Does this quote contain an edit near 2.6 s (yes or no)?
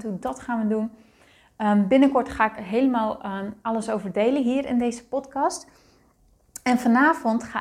yes